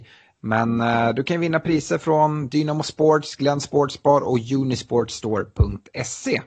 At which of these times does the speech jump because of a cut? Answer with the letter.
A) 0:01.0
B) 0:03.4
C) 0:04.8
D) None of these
D